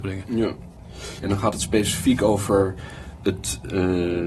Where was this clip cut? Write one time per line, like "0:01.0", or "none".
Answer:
0:01.2